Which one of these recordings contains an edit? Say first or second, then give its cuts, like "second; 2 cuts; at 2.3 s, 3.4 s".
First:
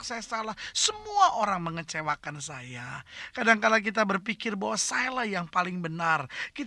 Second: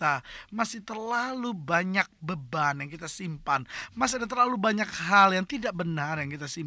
first; 1 cut; at 3.3 s